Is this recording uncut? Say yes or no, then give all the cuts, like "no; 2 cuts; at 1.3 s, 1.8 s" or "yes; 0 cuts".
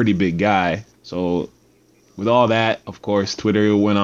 no; 1 cut; at 0.9 s